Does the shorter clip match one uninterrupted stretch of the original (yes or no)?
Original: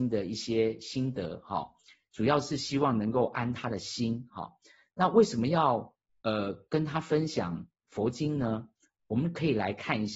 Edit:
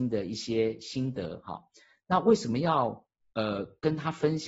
no